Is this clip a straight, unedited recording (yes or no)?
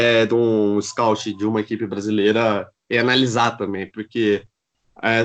yes